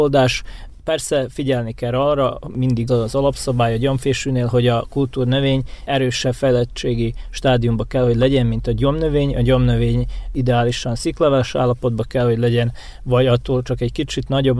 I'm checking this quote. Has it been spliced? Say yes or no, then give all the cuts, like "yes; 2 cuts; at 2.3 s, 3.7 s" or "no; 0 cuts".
yes; 1 cut; at 2.9 s